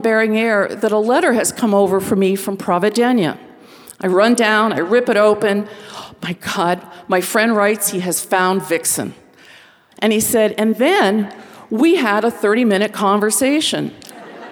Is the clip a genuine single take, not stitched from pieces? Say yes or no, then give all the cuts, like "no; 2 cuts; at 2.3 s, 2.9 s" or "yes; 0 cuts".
no; 1 cut; at 9.9 s